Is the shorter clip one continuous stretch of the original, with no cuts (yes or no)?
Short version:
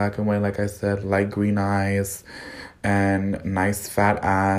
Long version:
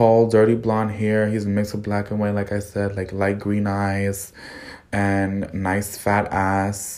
no